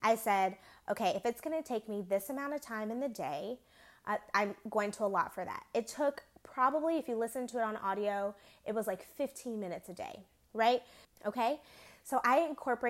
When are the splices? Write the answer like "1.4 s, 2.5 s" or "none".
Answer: 11.0 s